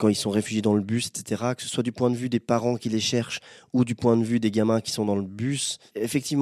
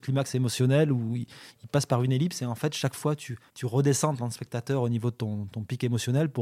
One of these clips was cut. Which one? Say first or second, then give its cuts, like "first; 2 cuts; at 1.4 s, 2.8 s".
second; 1 cut; at 3.5 s